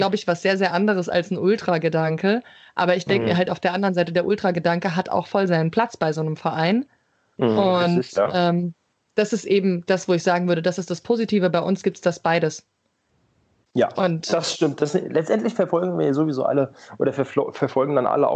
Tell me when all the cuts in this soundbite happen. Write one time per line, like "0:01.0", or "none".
none